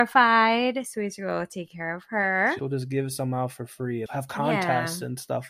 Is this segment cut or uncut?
cut